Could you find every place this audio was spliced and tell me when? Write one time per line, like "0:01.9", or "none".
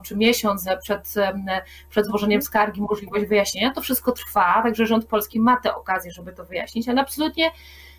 none